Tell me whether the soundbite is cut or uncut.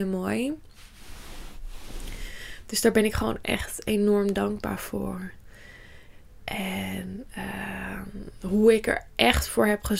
uncut